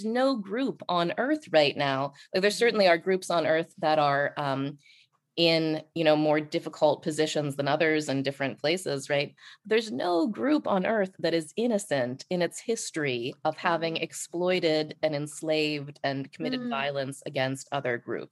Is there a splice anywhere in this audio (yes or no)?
no